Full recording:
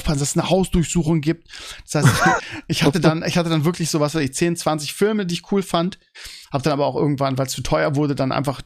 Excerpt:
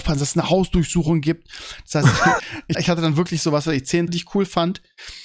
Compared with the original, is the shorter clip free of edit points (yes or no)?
no